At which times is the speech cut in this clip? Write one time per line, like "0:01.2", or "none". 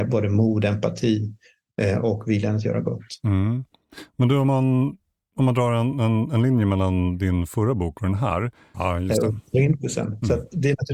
0:08.7